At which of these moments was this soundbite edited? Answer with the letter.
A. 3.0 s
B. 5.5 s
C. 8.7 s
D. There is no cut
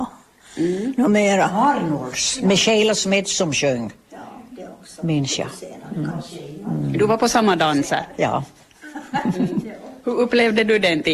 D